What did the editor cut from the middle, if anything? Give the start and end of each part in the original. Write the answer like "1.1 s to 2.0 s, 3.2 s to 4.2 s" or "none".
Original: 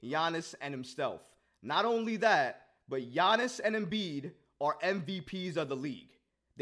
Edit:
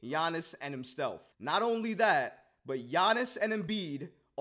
1.3 s to 1.5 s